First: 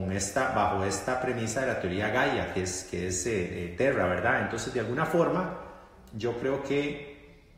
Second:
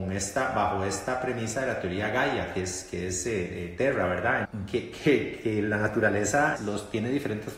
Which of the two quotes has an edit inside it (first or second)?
second